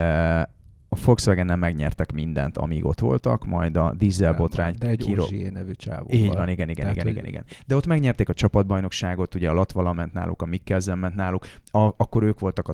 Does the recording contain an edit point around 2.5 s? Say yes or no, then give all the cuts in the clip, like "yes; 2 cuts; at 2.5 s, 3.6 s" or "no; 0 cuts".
yes; 1 cut; at 2.5 s